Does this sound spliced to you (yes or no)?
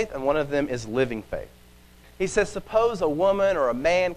yes